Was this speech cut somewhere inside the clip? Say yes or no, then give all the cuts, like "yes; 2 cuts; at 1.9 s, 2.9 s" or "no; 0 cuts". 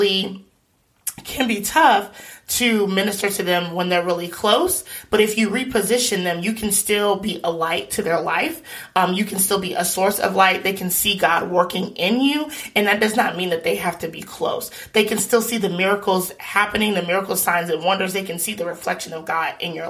no; 0 cuts